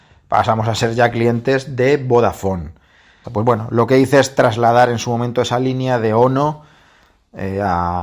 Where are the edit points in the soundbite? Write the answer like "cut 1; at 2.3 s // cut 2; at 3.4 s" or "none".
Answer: cut 1; at 3.2 s